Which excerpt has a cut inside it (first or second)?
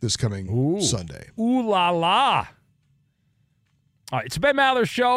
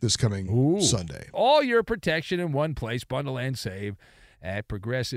second